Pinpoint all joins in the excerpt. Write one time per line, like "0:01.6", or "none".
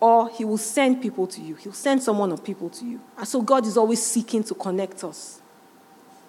0:03.1